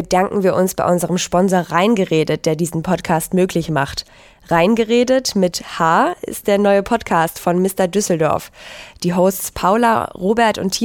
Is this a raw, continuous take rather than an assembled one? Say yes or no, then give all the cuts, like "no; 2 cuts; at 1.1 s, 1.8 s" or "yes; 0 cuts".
yes; 0 cuts